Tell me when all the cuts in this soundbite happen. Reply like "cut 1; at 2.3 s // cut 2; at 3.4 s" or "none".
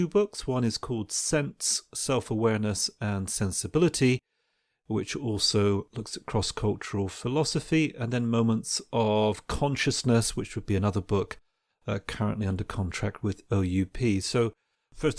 none